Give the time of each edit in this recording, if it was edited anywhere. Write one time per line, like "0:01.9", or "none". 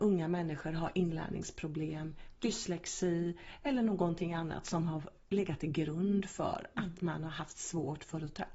0:02.4